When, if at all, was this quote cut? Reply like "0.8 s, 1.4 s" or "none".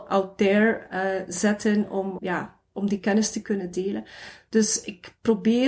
2.2 s